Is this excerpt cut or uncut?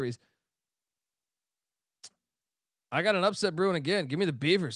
uncut